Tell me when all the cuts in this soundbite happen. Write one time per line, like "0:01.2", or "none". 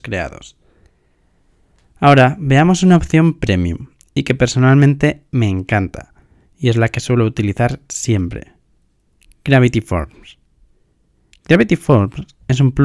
none